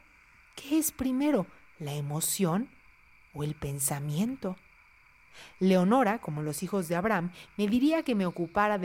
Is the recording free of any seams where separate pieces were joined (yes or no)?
yes